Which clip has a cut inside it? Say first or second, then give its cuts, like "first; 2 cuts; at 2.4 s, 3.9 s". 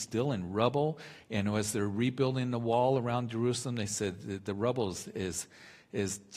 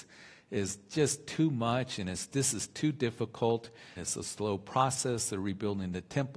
second; 1 cut; at 4.0 s